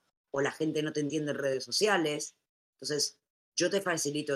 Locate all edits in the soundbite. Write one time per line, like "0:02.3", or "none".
none

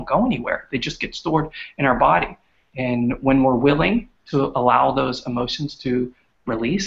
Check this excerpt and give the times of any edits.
none

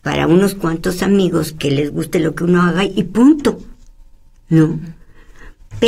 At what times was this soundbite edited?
none

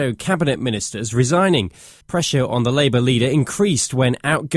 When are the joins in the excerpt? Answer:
0:02.0

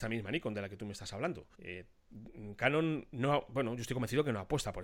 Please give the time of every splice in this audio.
0:01.5

